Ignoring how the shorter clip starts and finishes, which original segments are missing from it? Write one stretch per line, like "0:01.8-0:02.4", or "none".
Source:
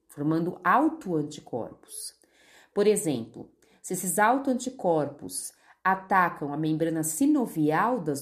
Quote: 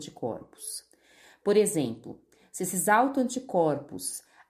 none